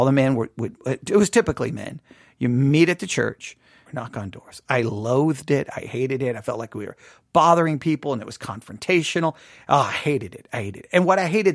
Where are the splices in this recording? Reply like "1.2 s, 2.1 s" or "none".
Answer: 3.9 s

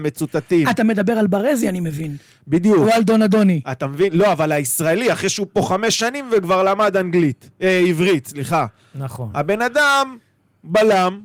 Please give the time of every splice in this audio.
none

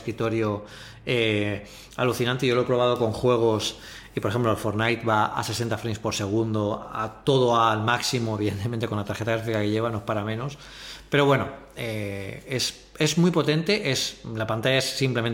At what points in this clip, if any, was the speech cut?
none

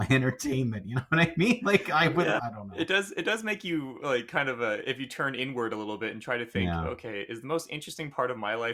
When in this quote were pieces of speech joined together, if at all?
2.4 s

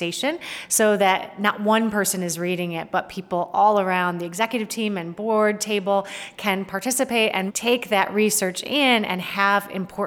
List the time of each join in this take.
7.5 s

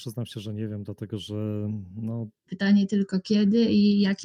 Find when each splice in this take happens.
2.5 s

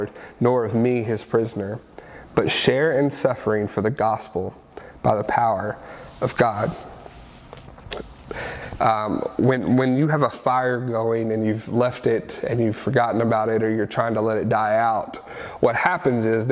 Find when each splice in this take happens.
8.8 s

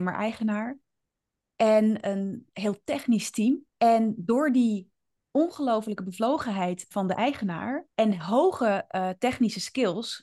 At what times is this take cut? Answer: 3.7 s, 7.9 s

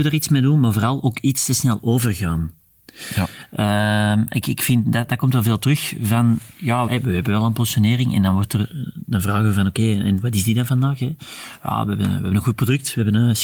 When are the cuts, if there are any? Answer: 6.9 s

